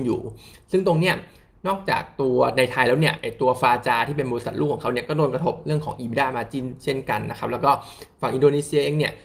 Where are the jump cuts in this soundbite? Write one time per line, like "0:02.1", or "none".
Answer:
none